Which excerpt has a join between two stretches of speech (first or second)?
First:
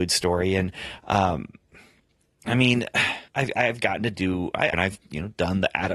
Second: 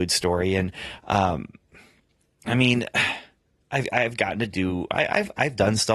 first